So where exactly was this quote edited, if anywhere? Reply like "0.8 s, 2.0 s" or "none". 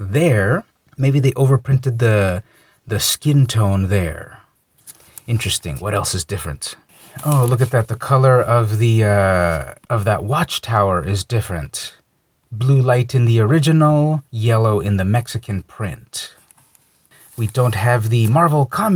none